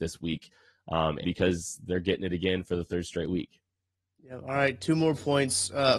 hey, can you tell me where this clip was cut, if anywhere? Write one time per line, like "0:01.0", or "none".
0:01.2

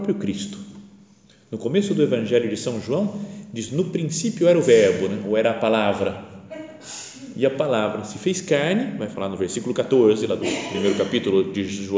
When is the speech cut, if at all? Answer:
none

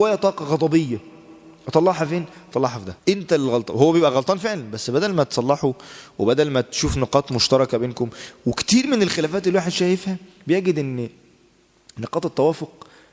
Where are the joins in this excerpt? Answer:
0:03.0

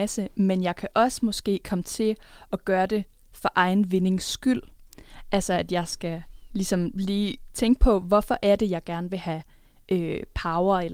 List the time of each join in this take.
none

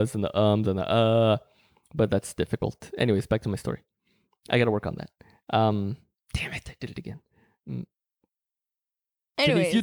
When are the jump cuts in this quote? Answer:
none

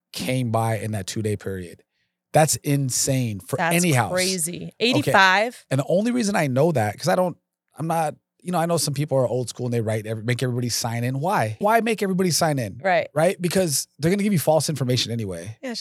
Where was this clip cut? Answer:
0:11.6

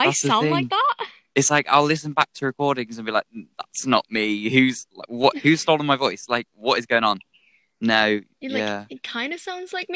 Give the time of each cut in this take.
none

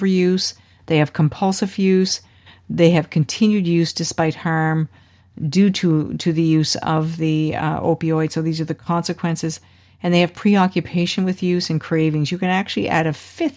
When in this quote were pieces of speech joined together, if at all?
none

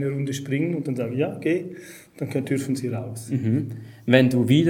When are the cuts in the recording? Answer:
none

